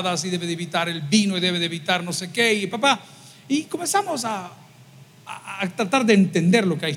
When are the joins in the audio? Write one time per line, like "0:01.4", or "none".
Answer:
0:02.7